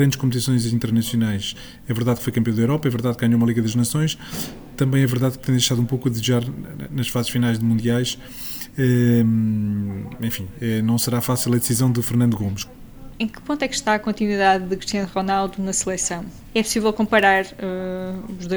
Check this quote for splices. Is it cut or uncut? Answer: cut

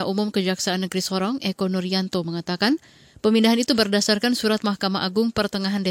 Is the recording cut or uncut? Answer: uncut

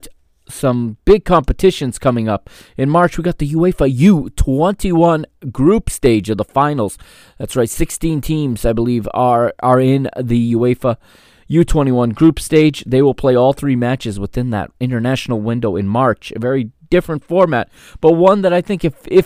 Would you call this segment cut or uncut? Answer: uncut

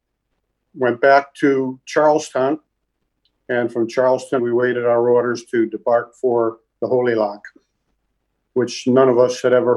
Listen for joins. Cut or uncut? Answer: cut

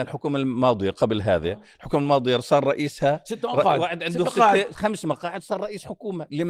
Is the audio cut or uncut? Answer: cut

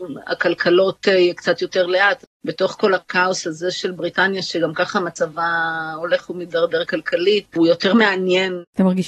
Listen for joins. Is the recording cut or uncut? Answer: cut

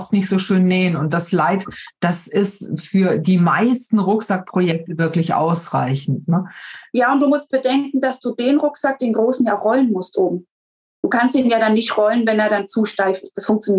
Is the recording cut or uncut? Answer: uncut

